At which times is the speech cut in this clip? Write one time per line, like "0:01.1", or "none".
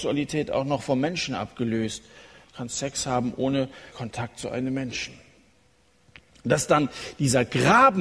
0:02.4
0:03.9